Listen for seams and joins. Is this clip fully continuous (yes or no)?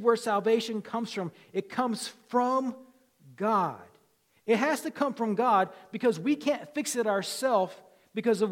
yes